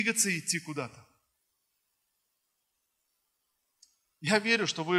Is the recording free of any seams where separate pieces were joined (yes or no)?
yes